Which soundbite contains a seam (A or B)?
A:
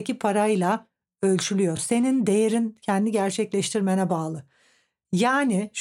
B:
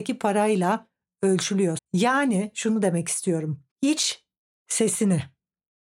B